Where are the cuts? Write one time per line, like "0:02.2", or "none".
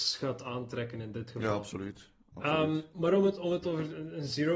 none